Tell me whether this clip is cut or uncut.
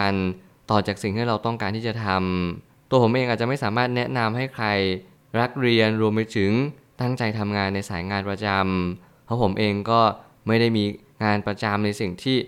uncut